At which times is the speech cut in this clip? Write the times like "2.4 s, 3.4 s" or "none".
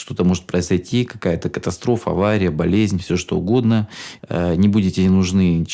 4.2 s